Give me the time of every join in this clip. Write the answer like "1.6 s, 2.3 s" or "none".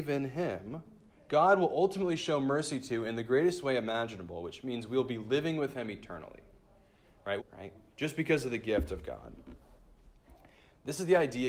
7.4 s